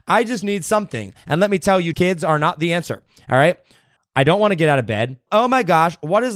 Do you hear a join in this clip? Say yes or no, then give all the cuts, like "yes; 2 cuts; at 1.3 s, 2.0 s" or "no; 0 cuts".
yes; 3 cuts; at 1.9 s, 4.0 s, 5.3 s